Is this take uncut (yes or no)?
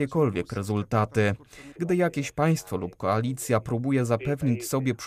no